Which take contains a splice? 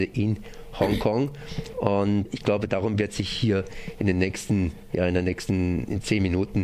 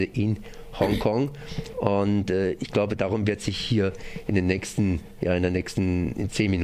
first; 1 cut; at 2.3 s

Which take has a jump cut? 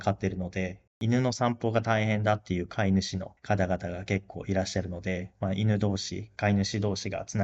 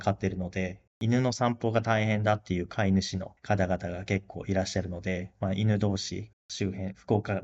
second; 1 cut; at 6.3 s

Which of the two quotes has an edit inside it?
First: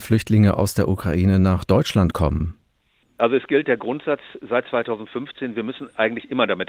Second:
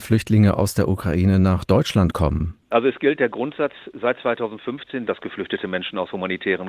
second; 2 cuts; at 2.6 s, 5.1 s

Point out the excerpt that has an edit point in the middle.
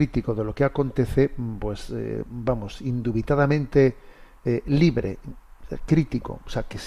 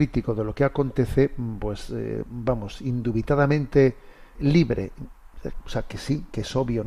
second; 2 cuts; at 4.4 s, 5.6 s

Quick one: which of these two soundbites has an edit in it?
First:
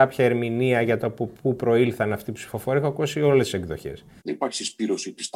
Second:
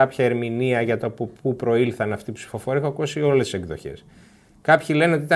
first; 1 cut; at 4.2 s

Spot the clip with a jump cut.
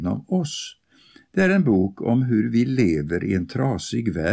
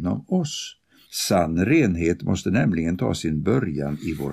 second; 1 cut; at 1.0 s

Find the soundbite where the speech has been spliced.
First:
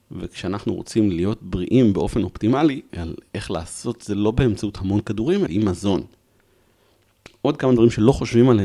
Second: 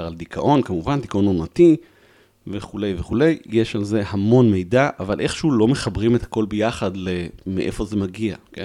first; 2 cuts; at 2.9 s, 5.5 s

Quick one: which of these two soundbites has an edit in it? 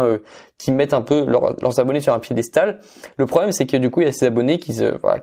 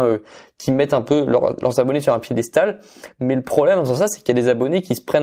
first; 1 cut; at 3.1 s

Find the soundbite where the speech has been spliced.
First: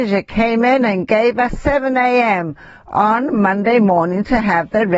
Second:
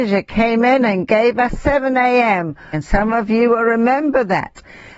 second; 1 cut; at 2.7 s

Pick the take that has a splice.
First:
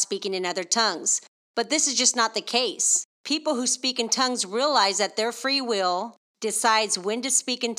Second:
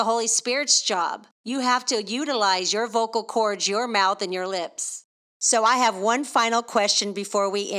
second; 1 cut; at 1.3 s

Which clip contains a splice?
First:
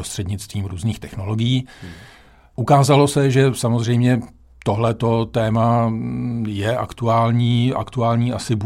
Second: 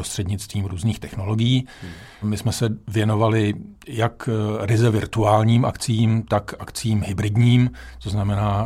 second; 1 cut; at 2.2 s

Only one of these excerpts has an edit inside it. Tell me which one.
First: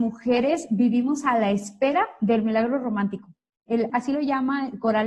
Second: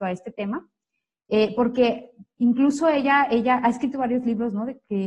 first; 1 cut; at 3.9 s

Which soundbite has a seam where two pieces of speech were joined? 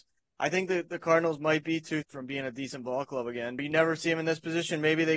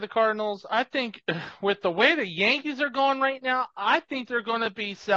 first; 2 cuts; at 2.0 s, 3.6 s

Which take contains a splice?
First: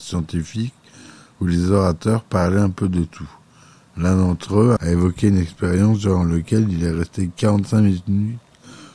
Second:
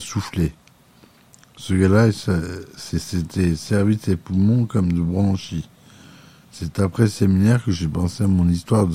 first; 1 cut; at 4.8 s

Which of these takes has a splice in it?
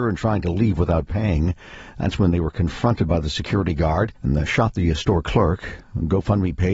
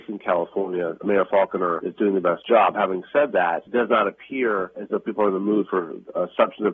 first; 1 cut; at 4.2 s

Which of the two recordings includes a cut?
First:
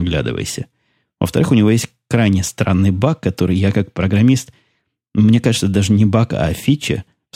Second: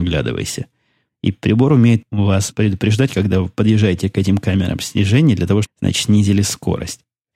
second; 2 cuts; at 1.1 s, 5.6 s

